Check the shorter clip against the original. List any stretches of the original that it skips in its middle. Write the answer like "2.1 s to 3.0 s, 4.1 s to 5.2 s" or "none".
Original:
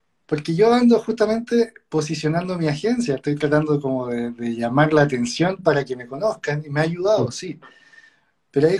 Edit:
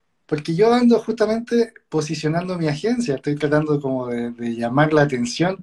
none